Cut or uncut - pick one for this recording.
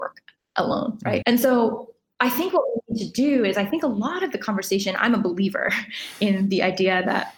cut